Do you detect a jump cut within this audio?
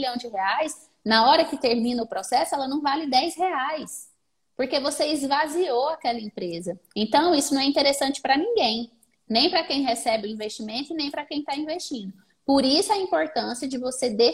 no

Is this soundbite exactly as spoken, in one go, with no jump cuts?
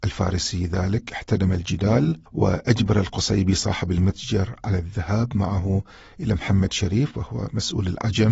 no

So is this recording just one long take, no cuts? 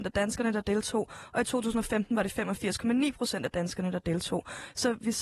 yes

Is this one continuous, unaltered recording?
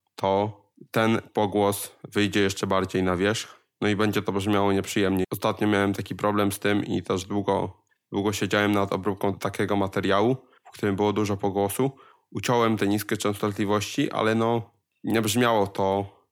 no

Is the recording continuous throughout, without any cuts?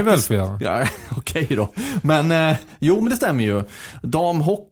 yes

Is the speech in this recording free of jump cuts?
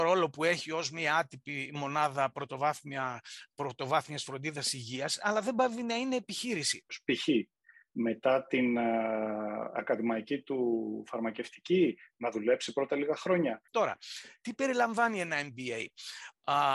no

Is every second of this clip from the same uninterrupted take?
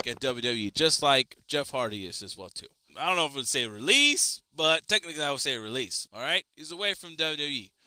no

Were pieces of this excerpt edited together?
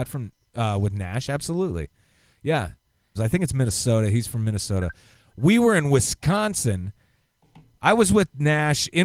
yes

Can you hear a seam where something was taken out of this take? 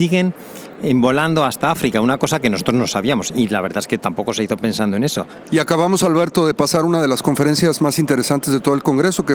yes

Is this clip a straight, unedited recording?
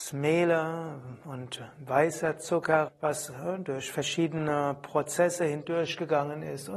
no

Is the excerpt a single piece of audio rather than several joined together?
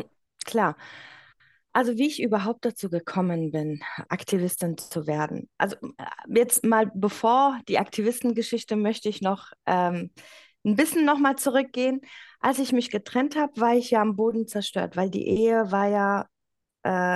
no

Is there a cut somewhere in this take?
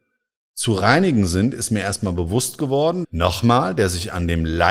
yes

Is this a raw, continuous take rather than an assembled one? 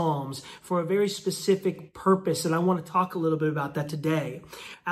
yes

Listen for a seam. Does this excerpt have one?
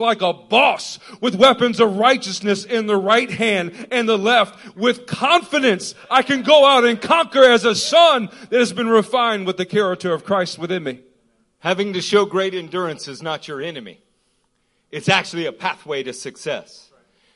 no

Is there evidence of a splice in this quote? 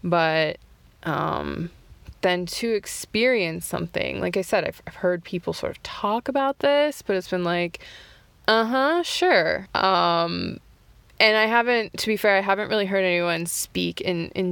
yes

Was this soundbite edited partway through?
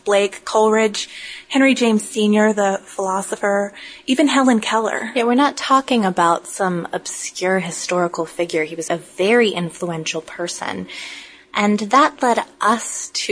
yes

